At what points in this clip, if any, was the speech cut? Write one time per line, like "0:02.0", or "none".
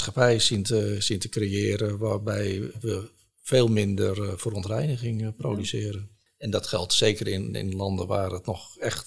0:06.3

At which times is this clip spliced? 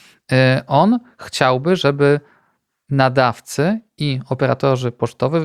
none

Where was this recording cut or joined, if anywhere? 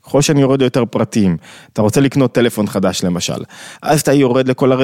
none

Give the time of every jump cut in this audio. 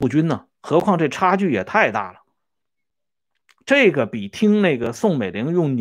none

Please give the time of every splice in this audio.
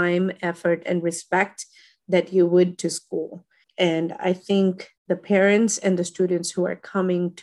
0:03.6
0:05.0

